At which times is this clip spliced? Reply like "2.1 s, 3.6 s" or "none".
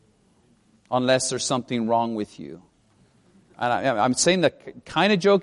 none